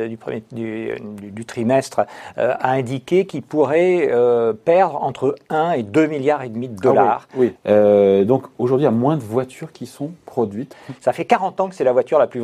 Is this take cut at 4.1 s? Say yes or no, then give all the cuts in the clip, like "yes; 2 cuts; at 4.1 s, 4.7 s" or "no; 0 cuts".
no; 2 cuts; at 7.6 s, 10.7 s